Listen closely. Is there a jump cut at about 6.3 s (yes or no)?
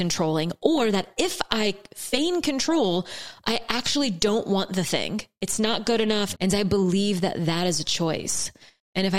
yes